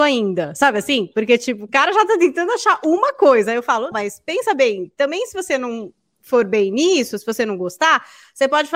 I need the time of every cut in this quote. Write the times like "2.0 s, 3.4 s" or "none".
3.9 s